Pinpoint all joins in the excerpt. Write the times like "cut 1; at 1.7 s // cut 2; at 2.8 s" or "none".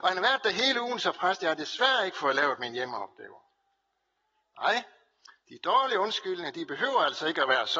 none